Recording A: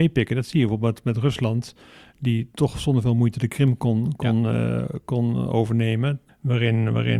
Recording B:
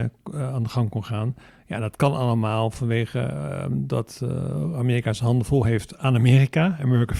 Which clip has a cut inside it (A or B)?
A